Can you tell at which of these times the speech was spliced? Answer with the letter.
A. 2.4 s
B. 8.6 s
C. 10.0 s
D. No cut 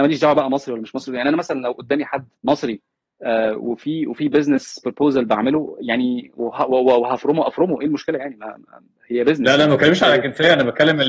A